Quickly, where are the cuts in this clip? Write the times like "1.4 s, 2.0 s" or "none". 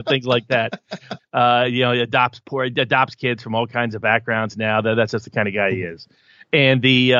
1.2 s